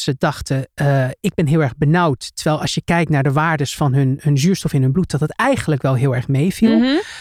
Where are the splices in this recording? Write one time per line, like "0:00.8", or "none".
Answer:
none